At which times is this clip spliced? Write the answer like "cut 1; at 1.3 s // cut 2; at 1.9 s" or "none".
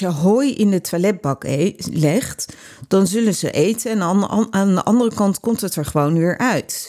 none